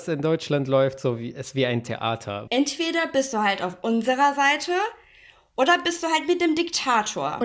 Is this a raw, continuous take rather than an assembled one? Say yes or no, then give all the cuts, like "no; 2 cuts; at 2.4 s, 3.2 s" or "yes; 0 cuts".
no; 1 cut; at 2.5 s